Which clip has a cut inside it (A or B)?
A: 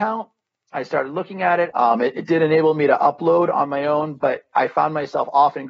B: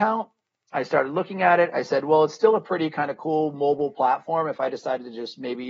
A